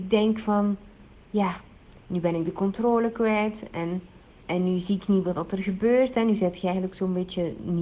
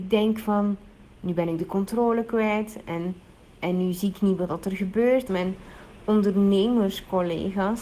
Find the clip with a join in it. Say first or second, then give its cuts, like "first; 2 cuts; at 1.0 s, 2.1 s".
second; 2 cuts; at 1.2 s, 5.3 s